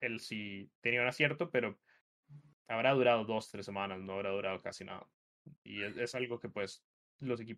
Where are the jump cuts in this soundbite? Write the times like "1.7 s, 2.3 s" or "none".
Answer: none